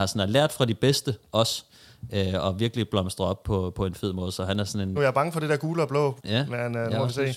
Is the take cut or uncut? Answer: cut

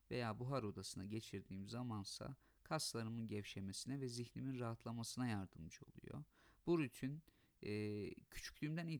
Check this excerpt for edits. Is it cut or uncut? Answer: uncut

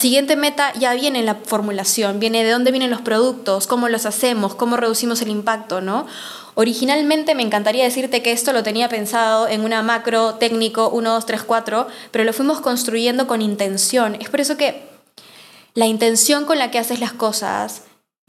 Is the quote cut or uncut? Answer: uncut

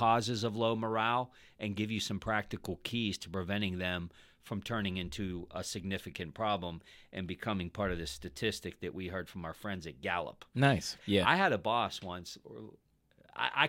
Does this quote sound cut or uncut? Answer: cut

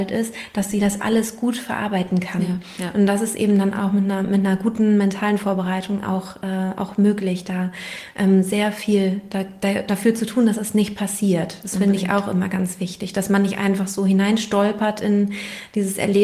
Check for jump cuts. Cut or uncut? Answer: uncut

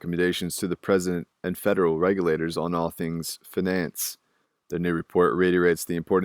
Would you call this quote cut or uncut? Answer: uncut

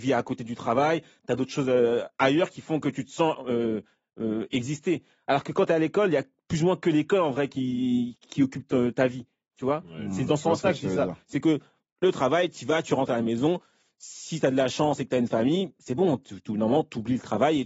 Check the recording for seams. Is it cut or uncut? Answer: uncut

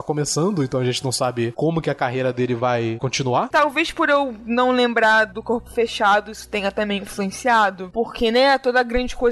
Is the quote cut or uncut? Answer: cut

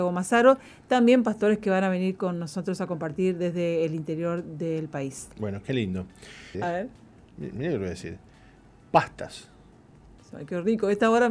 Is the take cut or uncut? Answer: cut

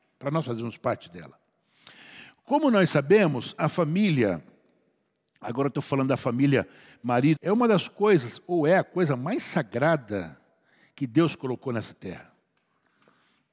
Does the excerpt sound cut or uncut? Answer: cut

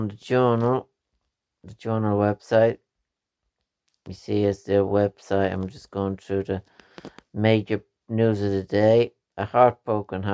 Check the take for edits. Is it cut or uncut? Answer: uncut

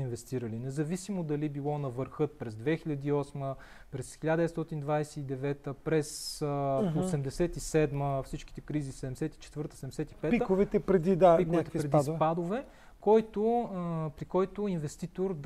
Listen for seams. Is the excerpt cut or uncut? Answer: uncut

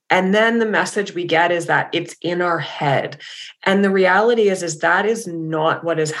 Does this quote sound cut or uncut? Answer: uncut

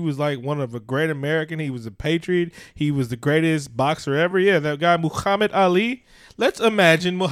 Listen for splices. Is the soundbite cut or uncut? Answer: uncut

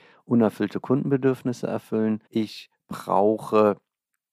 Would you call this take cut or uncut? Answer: cut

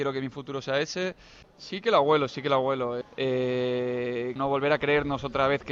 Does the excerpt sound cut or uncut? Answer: cut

